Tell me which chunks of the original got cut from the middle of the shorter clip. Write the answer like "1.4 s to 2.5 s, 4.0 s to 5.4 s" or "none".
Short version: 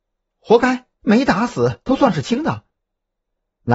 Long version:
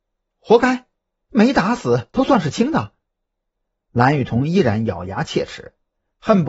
0.9 s to 1.2 s